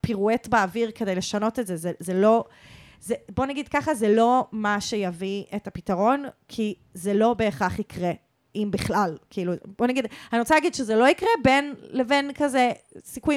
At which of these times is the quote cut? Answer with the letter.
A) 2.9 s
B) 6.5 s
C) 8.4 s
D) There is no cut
D